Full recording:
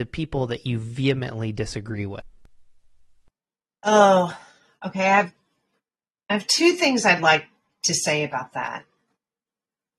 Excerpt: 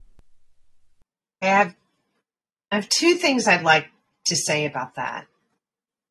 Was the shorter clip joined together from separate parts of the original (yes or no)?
yes